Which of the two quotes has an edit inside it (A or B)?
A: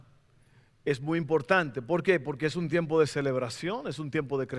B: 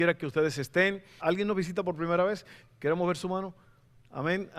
B